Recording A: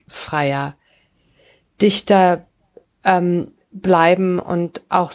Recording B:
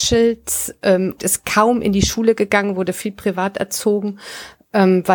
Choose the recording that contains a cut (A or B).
B